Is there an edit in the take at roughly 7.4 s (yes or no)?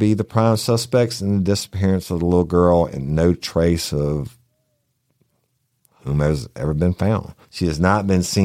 yes